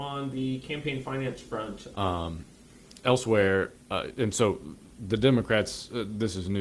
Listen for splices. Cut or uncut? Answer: cut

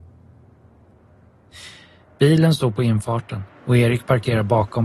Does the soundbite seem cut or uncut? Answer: cut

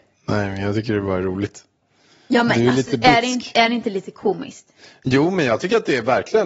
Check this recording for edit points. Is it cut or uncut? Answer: uncut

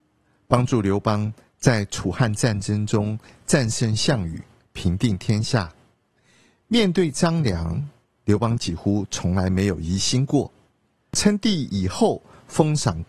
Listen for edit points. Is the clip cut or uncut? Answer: cut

